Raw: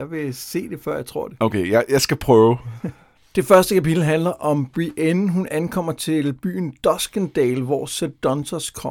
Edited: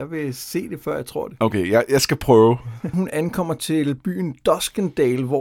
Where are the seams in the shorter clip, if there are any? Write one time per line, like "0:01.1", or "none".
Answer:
0:02.9

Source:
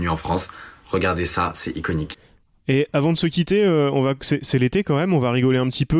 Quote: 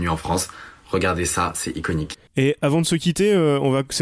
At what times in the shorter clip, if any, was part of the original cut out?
0:02.3

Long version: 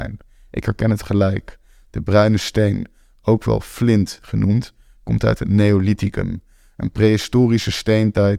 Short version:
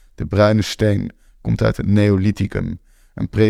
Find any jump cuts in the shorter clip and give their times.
0:01.3

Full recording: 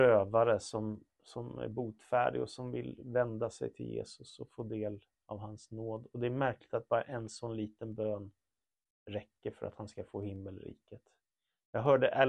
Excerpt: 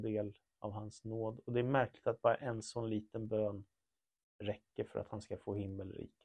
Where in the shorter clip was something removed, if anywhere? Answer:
none

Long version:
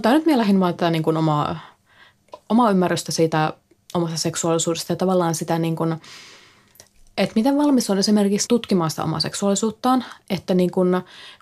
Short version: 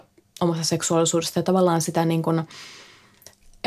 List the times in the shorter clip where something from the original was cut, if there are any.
none

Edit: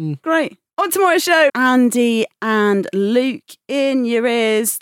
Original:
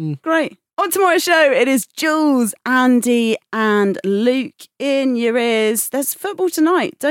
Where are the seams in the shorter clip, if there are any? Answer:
0:01.5

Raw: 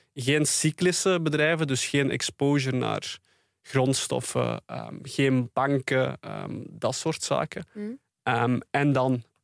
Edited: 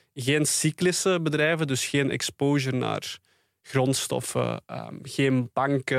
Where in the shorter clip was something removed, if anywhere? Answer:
none

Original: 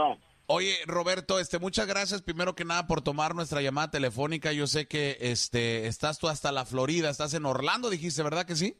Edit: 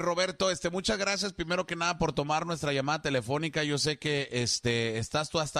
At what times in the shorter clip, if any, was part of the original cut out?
none

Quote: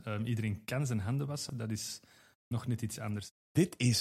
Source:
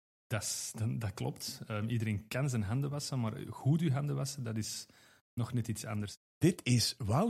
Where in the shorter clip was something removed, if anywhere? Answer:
0:01.5

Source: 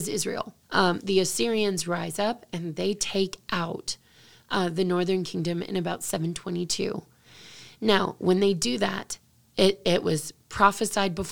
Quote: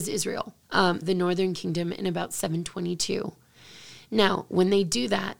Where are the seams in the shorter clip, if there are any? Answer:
0:01.0

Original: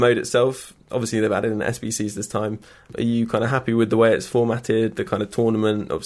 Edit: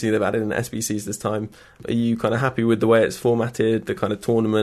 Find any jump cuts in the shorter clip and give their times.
none

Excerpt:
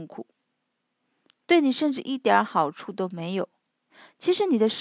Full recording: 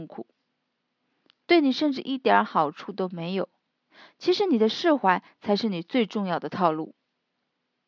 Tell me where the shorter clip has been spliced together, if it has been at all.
none

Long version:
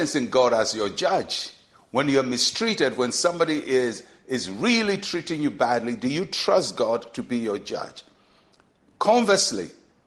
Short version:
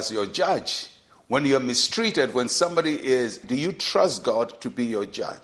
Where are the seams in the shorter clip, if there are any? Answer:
0:03.4

